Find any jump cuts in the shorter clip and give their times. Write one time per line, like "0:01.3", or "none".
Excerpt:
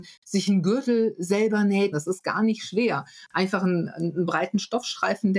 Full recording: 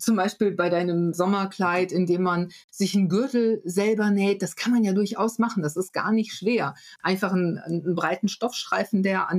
0:01.9